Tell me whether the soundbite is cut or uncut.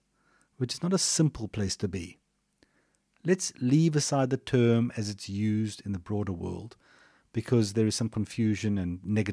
uncut